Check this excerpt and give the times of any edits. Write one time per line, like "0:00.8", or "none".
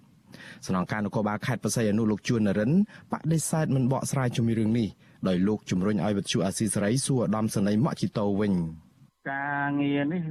none

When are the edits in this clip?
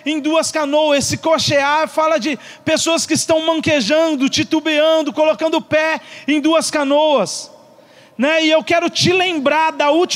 none

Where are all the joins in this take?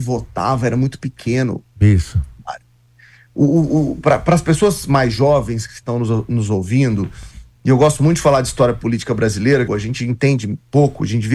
0:09.7

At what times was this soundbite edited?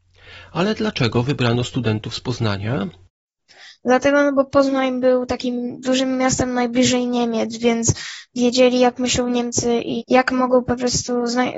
0:10.0

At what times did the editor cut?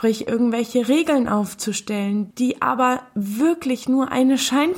0:02.3

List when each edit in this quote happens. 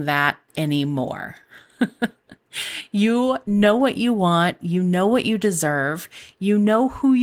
none

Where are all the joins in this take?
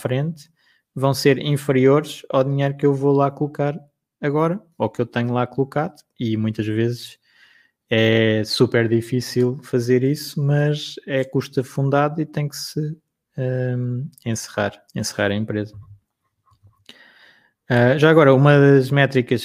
0:14.9

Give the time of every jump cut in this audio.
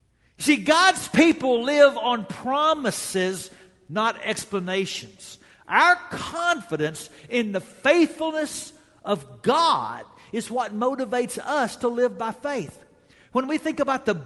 none

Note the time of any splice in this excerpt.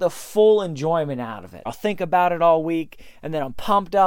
0:01.7

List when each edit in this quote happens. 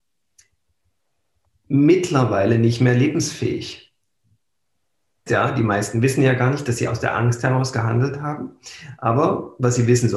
0:05.3

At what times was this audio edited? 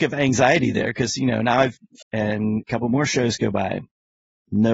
0:02.0

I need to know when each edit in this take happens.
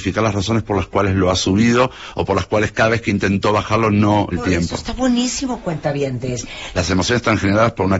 0:04.3
0:06.7

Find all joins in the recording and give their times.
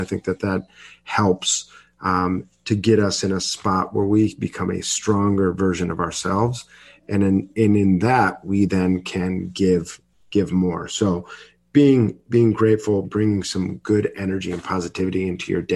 0:13.0

